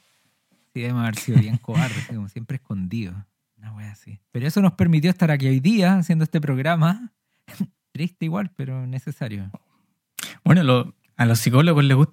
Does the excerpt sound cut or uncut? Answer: cut